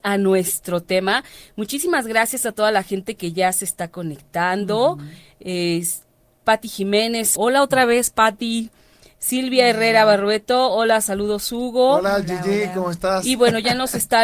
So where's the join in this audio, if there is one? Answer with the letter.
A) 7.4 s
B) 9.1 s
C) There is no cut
A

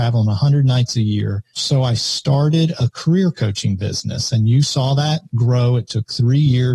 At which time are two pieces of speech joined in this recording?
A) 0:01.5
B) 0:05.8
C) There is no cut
A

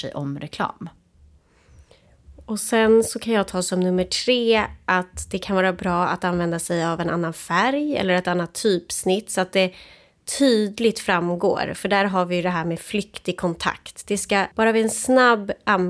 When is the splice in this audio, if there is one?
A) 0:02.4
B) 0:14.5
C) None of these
B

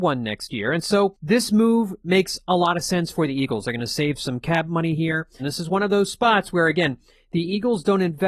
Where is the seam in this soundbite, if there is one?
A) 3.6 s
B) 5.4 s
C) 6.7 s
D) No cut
B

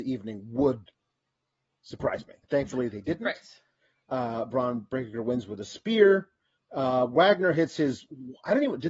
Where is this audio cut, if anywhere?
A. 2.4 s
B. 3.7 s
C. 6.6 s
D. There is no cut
A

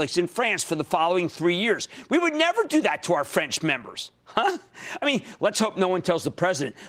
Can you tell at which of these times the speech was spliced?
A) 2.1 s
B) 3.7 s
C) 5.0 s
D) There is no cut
D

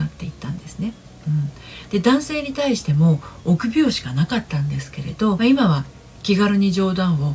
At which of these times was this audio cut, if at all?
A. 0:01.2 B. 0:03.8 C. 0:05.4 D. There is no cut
C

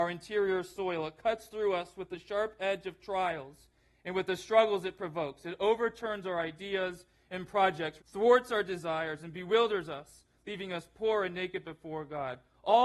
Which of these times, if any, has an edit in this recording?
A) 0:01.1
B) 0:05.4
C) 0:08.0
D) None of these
C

